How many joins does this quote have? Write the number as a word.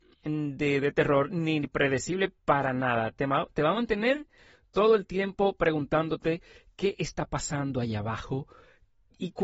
zero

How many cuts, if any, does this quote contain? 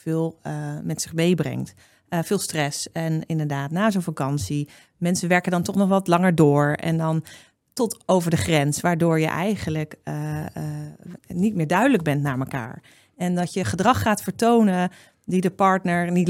one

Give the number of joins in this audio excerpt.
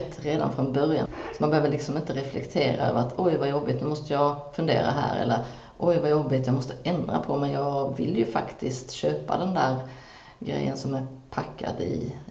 one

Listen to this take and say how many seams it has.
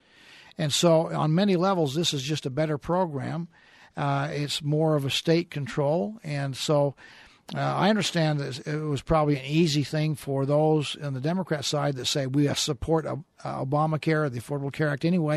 zero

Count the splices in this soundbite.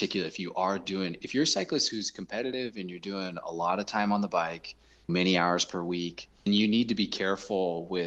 one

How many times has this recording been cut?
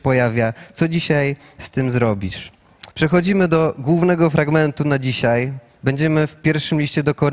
one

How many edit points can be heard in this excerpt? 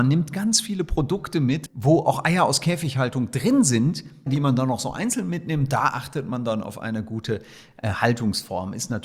one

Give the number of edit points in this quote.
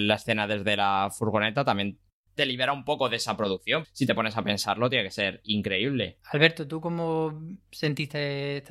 two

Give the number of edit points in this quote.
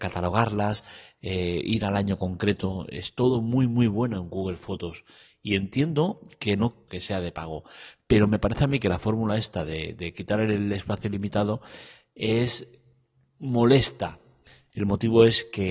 two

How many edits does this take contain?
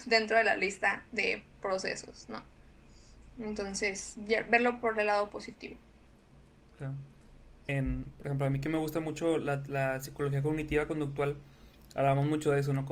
one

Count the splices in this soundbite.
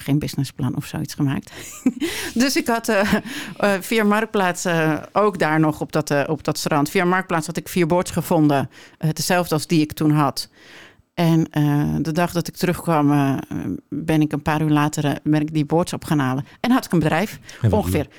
zero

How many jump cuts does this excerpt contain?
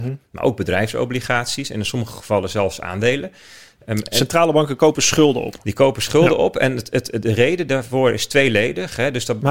zero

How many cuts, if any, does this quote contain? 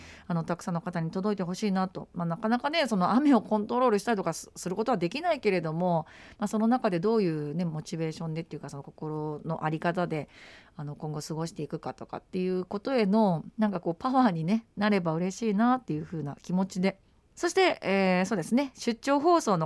one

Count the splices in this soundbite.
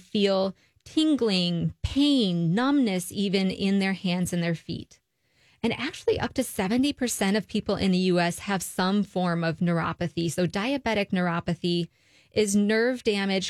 one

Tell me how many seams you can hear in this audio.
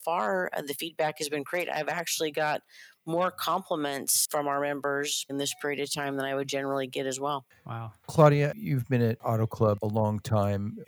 one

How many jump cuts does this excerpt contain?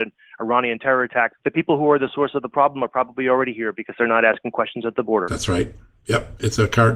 one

